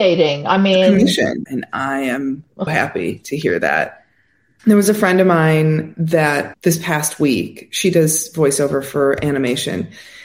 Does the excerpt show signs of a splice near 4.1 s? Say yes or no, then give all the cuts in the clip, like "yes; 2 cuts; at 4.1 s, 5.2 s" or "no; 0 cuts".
no; 2 cuts; at 1.5 s, 2.7 s